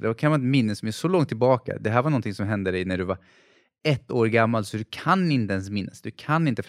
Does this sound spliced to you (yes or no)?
no